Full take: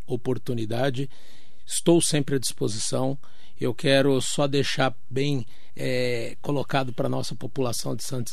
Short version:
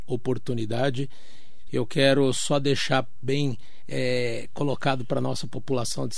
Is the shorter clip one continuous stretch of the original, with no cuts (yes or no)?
no